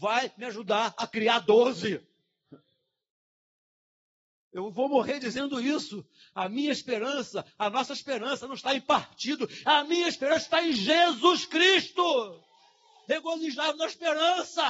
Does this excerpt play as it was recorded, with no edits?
no; 2 cuts; at 9.6 s, 13.0 s

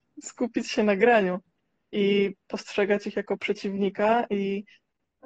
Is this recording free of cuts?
yes; 0 cuts

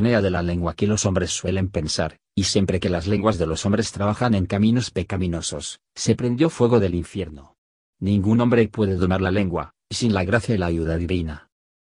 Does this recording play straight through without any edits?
yes; 0 cuts

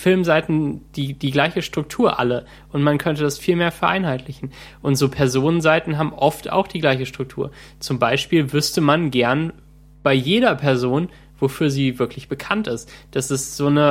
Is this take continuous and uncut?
yes; 0 cuts

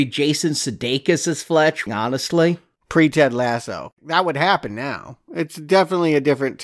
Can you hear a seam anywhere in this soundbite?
yes; 2 cuts; at 1.9 s, 5.3 s

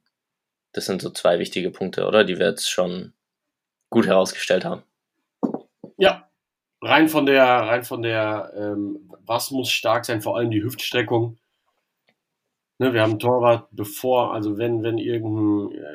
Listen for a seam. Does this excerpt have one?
no; 0 cuts

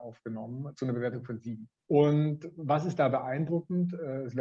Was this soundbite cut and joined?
yes; 1 cut; at 1.8 s

